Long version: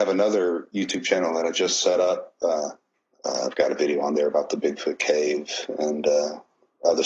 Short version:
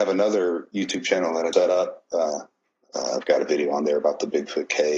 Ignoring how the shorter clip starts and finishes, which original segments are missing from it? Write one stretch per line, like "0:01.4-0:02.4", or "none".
0:01.5-0:01.8